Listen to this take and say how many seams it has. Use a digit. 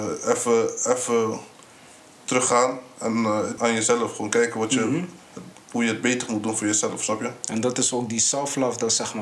1